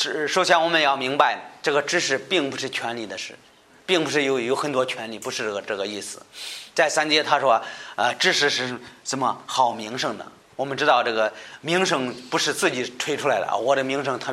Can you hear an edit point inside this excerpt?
no; 0 cuts

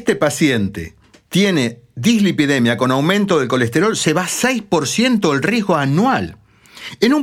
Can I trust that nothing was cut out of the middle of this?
yes; 0 cuts

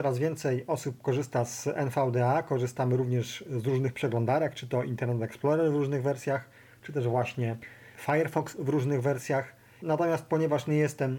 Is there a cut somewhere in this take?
no; 0 cuts

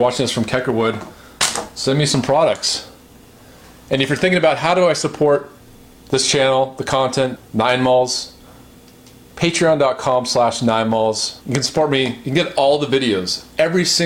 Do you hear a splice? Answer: yes; 2 cuts; at 7.4 s, 11.4 s

